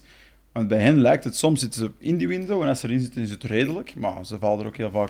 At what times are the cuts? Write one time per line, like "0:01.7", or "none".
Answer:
none